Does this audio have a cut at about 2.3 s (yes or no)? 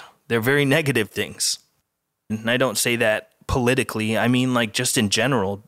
yes